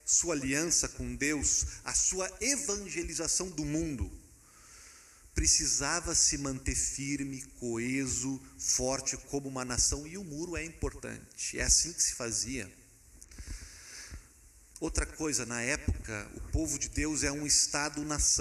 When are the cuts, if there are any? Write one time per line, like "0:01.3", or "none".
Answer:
none